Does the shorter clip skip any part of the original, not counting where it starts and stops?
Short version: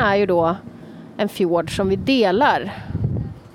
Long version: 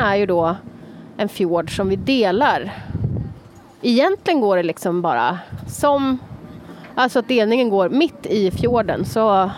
no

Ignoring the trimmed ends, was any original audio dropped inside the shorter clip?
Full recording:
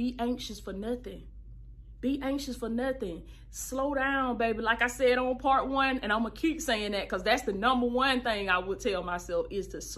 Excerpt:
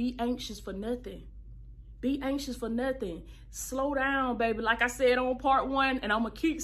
no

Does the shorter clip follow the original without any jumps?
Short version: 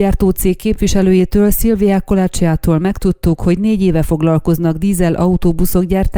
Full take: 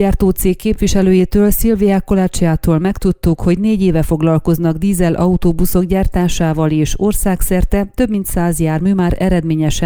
yes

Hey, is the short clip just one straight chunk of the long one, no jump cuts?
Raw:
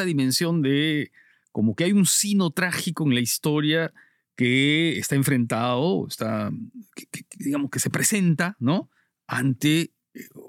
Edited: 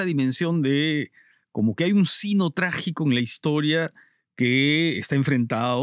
yes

